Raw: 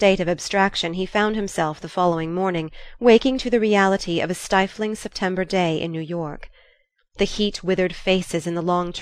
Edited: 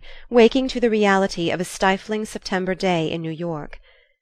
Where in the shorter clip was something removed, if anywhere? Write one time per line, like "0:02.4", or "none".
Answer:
none